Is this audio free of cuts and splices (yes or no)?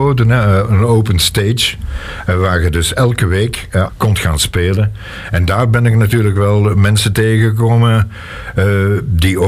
no